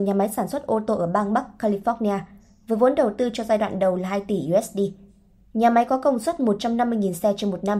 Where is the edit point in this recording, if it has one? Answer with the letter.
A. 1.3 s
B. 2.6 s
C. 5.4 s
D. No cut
D